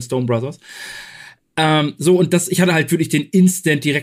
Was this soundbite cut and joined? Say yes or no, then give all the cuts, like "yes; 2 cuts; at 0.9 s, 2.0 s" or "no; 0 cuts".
no; 0 cuts